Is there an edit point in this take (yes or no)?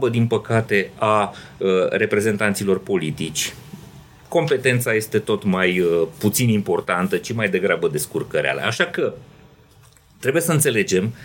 no